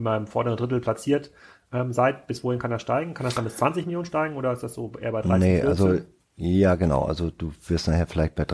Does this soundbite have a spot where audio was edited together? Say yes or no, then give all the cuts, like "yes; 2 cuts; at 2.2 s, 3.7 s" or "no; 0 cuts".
no; 0 cuts